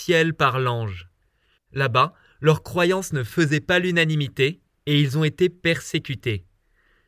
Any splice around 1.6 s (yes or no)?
yes